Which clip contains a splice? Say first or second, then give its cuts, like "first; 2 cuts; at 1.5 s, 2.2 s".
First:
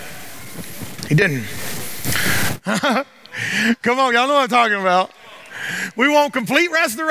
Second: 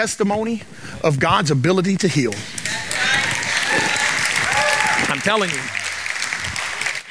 first; 1 cut; at 2.6 s